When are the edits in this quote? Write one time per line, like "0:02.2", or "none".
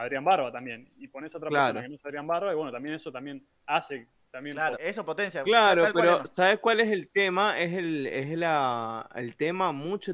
0:04.8